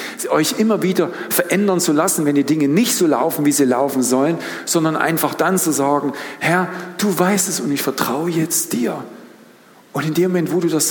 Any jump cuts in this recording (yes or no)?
no